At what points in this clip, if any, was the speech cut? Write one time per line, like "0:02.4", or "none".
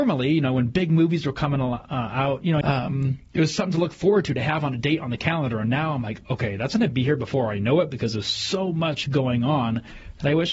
0:02.6